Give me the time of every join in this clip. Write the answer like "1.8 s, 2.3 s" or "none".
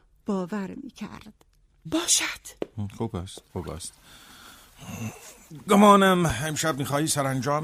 1.9 s, 3.5 s